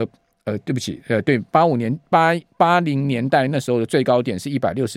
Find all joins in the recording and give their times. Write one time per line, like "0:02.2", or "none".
0:01.5